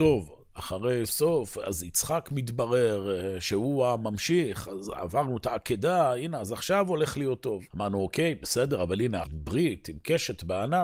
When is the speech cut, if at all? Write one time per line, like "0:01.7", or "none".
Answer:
0:01.1
0:07.7
0:09.2